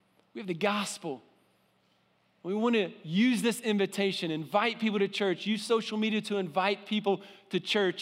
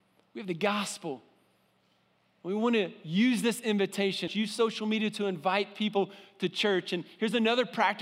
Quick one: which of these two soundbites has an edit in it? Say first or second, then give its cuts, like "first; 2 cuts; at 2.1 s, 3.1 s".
second; 1 cut; at 4.3 s